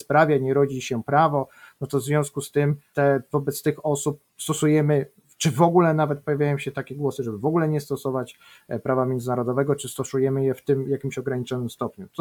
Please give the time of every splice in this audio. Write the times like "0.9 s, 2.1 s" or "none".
4.3 s